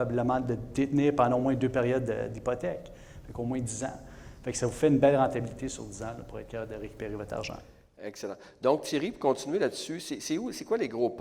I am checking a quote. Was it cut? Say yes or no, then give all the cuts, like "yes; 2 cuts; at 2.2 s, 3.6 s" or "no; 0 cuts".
no; 0 cuts